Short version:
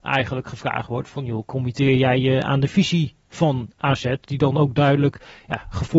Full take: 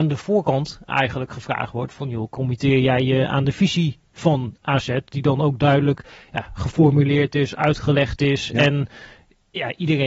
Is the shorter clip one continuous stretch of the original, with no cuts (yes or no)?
yes